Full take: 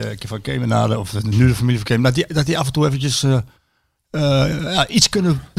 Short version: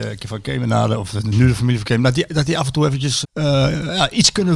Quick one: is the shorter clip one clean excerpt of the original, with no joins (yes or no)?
no